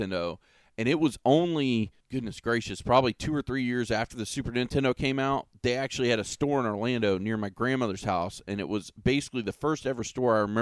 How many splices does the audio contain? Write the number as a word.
one